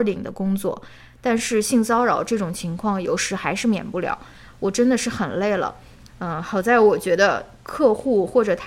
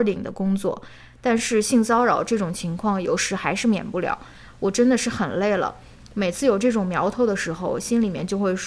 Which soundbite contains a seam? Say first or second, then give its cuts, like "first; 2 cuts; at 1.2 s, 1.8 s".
first; 1 cut; at 6.1 s